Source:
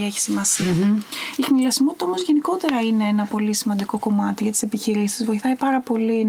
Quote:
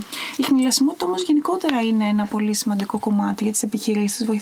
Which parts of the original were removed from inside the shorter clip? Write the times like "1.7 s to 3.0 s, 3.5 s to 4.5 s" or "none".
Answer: none